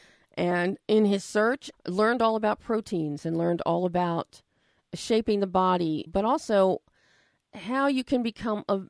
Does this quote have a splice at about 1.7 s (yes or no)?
yes